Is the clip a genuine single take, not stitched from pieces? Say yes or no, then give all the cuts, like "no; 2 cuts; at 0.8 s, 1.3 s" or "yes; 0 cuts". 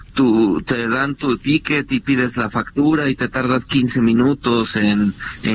yes; 0 cuts